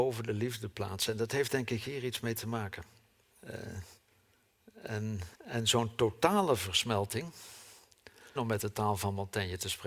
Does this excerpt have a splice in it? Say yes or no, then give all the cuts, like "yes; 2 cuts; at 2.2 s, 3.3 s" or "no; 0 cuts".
yes; 3 cuts; at 3.3 s, 5.3 s, 8.4 s